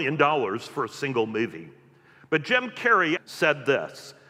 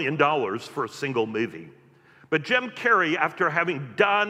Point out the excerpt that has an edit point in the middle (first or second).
first